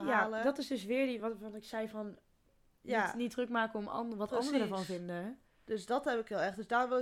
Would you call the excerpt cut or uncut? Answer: uncut